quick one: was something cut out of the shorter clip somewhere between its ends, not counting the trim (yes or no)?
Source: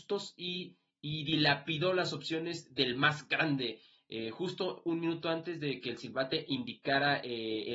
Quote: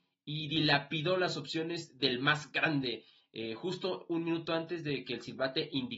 no